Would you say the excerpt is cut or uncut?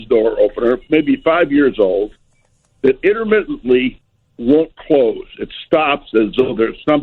uncut